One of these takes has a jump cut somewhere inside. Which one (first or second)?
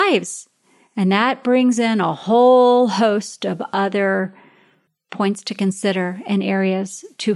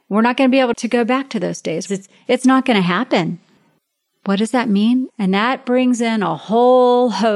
second